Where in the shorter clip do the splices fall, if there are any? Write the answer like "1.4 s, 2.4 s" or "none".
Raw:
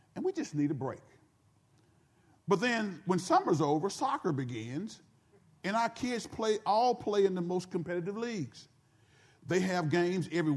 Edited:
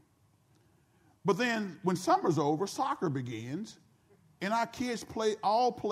none